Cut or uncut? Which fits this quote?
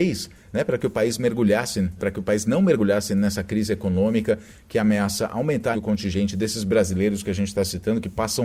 cut